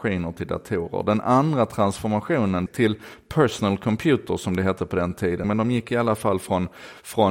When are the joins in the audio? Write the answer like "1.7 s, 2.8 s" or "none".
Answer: 2.7 s, 5.4 s

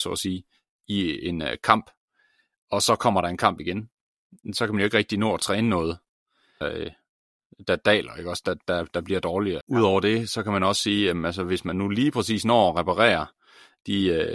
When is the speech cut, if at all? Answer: 6.6 s, 9.6 s

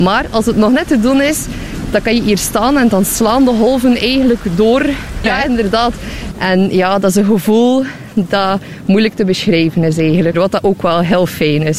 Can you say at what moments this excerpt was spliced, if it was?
5.2 s, 6.3 s, 10.3 s

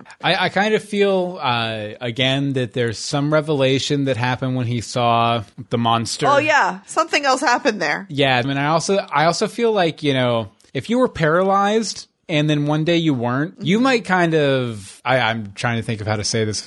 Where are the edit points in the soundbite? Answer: 8.4 s

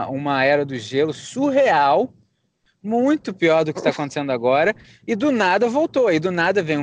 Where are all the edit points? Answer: none

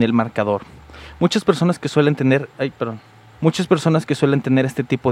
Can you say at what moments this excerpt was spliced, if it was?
3.4 s

